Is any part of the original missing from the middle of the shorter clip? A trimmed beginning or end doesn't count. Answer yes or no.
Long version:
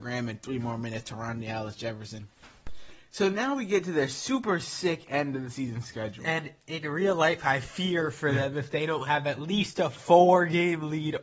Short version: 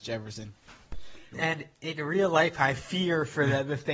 yes